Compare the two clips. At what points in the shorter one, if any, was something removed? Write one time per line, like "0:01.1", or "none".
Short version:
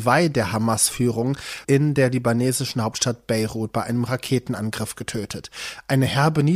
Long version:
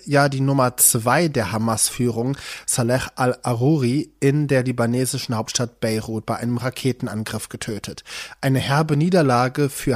0:01.6